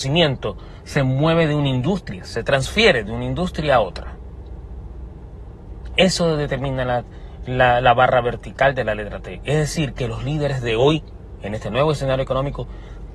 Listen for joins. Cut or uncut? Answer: uncut